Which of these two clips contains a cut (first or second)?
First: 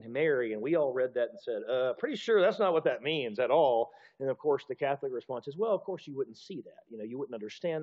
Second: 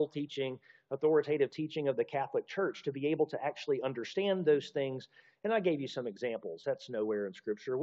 second